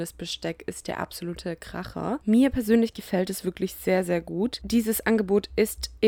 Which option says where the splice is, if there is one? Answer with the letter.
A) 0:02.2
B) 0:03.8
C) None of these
C